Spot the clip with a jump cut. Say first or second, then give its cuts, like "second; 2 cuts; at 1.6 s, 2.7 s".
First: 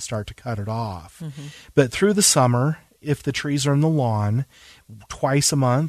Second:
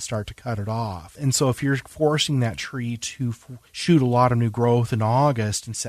second; 2 cuts; at 1.1 s, 3.7 s